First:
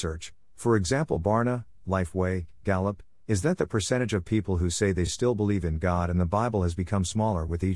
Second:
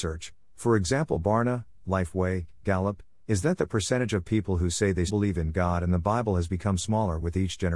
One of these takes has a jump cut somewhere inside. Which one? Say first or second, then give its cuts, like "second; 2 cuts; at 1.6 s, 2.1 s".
second; 1 cut; at 5.1 s